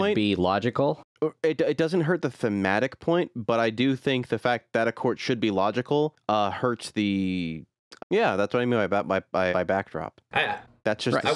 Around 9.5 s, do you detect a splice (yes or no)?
yes